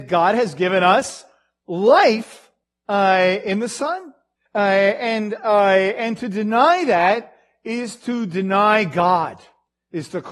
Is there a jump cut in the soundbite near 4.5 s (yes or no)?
yes